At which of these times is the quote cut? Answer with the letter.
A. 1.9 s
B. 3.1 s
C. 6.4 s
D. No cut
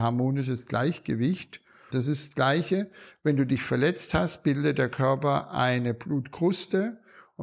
A